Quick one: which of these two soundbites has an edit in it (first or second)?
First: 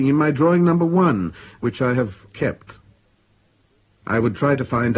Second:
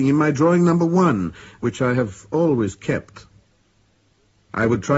first